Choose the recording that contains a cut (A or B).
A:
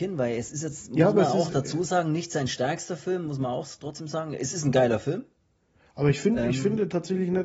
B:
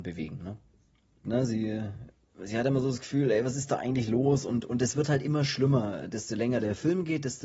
B